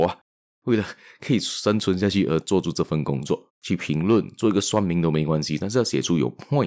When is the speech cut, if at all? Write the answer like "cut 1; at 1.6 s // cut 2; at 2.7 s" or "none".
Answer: cut 1; at 3.5 s